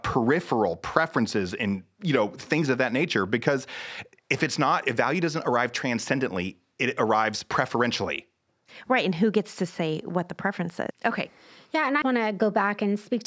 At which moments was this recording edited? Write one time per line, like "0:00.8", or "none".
0:10.9
0:12.0